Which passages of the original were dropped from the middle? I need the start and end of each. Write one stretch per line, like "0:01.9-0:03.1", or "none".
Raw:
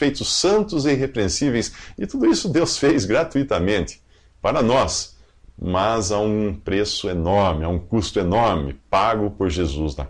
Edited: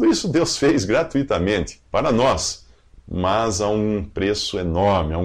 0:04.1-0:04.4